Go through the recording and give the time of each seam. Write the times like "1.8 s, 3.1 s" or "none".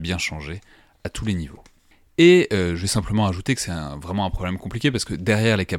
none